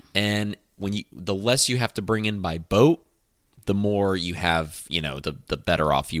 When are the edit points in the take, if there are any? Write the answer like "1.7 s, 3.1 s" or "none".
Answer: none

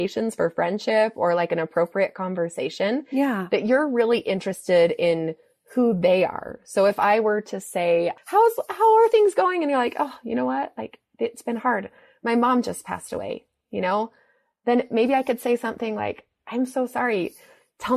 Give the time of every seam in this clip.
none

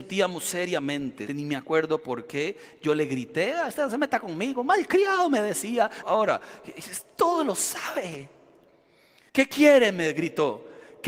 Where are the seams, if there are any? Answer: 1.3 s, 6.0 s, 9.3 s

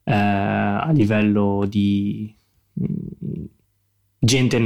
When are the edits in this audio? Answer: none

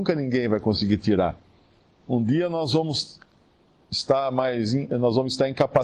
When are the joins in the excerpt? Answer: none

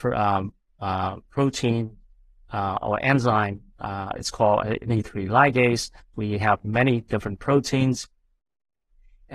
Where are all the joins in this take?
6.1 s

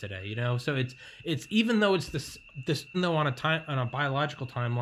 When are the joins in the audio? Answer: 2.9 s

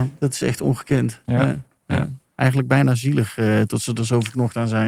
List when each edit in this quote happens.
2.2 s

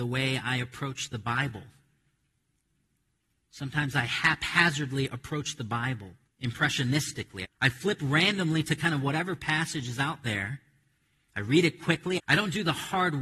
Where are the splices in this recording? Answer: 6.3 s, 7.4 s, 12.2 s

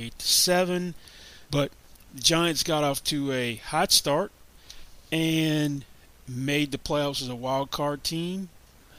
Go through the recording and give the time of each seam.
1.5 s

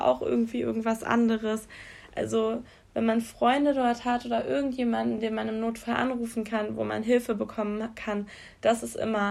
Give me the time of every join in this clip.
none

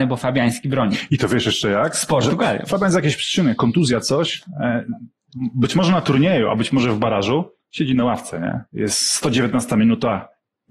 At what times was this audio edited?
none

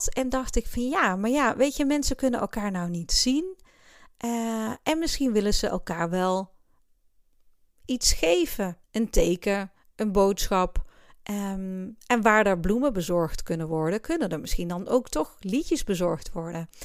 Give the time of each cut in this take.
8.8 s

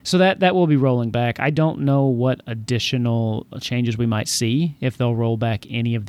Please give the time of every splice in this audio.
none

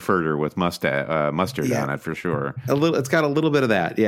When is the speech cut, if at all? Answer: none

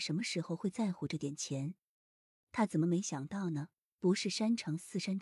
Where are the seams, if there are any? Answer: 2.4 s

